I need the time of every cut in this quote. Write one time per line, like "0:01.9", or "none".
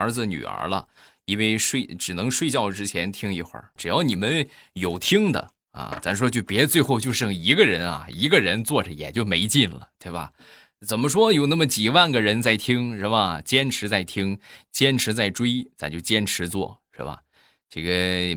0:03.8